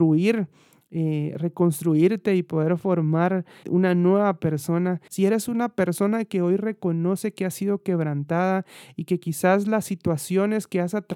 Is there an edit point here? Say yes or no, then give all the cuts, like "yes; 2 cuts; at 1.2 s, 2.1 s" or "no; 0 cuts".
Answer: yes; 2 cuts; at 3.6 s, 5.1 s